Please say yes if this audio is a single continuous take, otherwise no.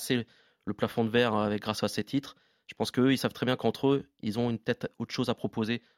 yes